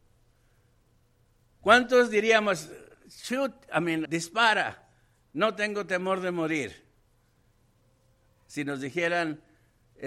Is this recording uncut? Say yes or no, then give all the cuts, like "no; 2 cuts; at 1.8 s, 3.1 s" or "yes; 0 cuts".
no; 1 cut; at 4.1 s